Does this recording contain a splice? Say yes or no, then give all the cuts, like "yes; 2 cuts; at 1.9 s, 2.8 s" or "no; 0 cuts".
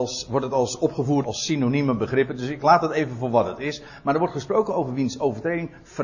yes; 1 cut; at 1.2 s